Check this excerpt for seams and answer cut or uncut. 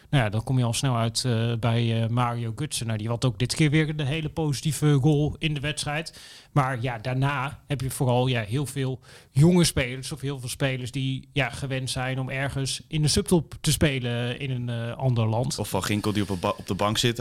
uncut